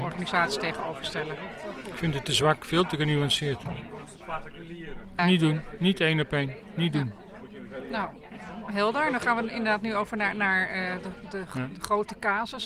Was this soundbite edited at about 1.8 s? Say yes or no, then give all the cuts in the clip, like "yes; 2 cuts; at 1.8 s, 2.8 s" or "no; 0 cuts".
no; 1 cut; at 5.2 s